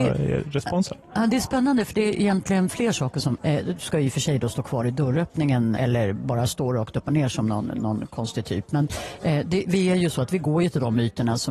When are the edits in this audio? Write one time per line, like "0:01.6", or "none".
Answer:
0:03.4
0:05.8